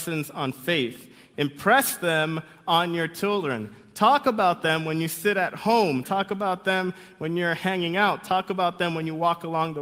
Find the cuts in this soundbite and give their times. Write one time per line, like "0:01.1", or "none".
0:01.3
0:06.0